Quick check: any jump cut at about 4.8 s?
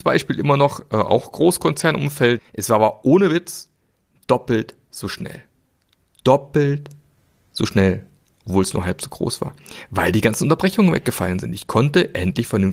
no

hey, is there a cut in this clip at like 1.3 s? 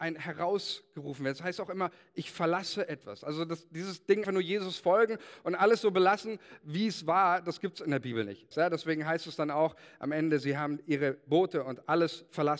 no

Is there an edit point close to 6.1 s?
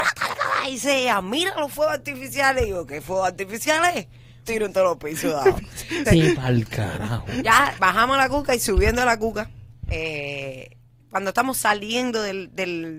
yes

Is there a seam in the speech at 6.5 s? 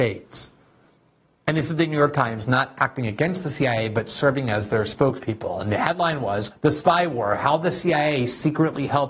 yes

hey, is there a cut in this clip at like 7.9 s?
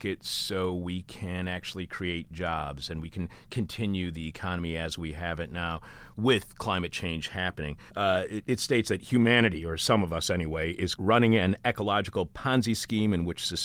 yes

